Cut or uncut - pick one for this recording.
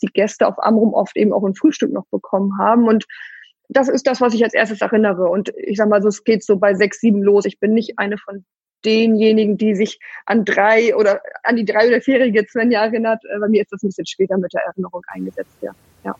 uncut